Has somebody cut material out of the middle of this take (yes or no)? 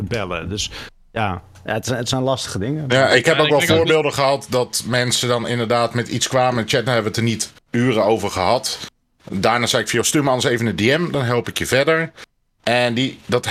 no